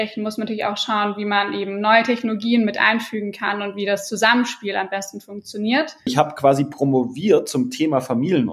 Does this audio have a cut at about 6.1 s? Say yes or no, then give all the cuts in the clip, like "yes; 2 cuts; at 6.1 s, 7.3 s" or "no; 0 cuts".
yes; 1 cut; at 6.1 s